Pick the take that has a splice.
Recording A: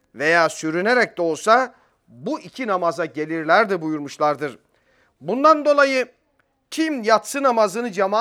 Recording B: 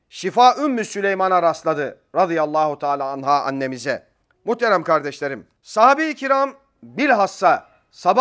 B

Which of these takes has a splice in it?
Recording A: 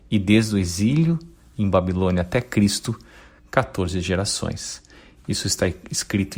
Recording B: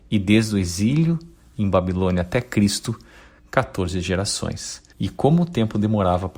B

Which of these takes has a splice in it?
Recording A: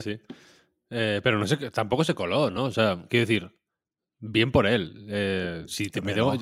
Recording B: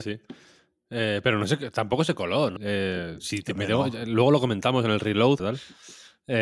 B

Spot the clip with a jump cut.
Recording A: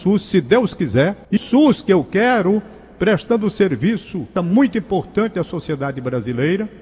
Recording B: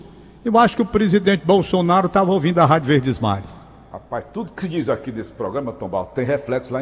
A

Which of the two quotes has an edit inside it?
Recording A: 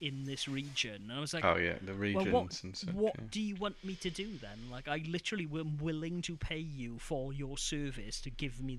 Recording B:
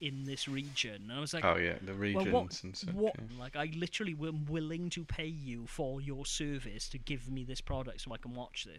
B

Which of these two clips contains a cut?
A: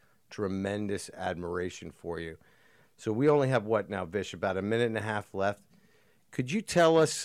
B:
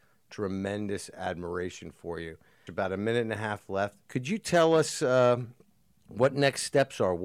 B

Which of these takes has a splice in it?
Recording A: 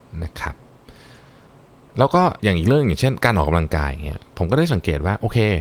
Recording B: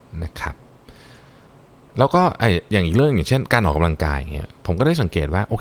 A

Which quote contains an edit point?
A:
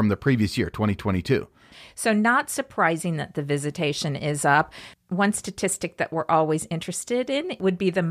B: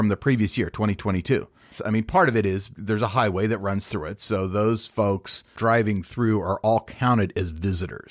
B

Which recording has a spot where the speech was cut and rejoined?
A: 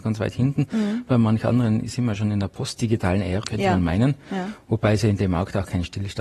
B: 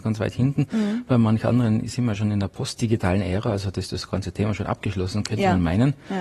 A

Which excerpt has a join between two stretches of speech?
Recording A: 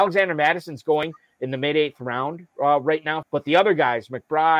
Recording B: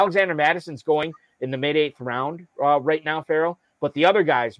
A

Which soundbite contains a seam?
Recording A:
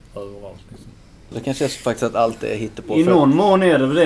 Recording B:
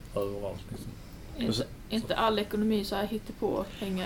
A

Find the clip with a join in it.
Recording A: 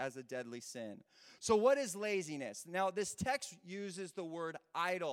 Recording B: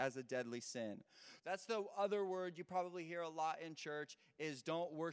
B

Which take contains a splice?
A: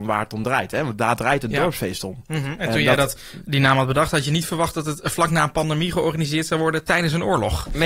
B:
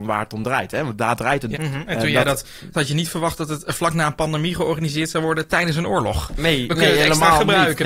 B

